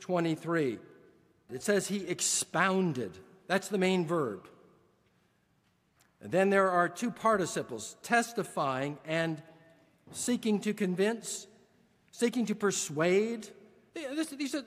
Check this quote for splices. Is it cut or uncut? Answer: cut